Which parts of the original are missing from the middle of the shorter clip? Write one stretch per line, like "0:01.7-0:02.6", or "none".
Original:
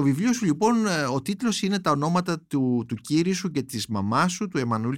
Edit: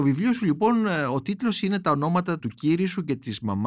0:02.4-0:02.9